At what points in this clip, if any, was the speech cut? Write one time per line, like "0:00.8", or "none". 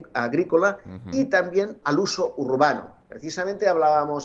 0:01.8